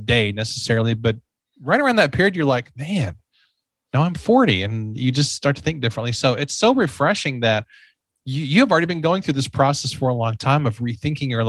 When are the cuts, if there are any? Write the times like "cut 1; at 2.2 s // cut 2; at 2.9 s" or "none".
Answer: none

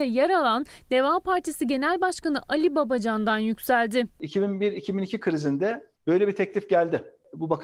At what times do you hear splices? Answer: cut 1; at 6.0 s

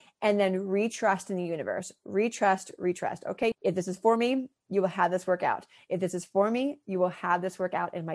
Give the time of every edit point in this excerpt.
cut 1; at 3.5 s

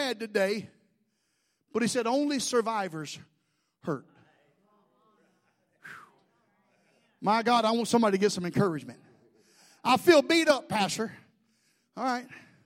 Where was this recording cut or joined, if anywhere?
none

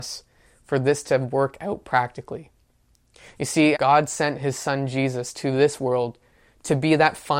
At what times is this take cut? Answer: cut 1; at 3.7 s

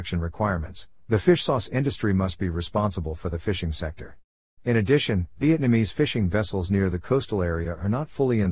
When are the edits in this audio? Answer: cut 1; at 4.6 s

